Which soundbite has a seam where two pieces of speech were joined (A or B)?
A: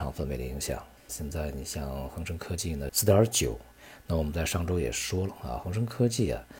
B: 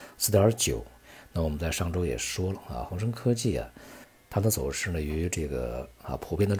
A